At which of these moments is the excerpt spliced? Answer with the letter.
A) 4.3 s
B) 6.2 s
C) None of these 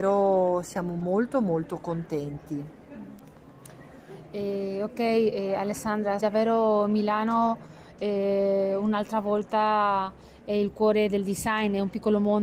B